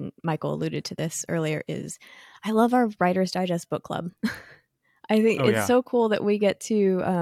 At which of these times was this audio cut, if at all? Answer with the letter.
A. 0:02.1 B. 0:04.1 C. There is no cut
C